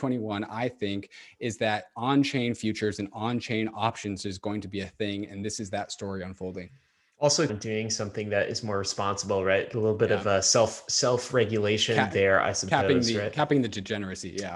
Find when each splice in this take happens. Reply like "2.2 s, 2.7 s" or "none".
7.5 s